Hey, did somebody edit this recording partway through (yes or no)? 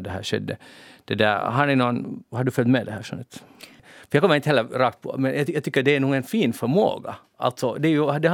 yes